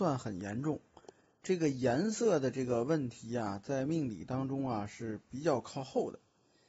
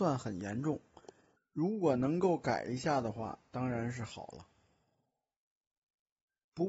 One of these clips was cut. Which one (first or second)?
second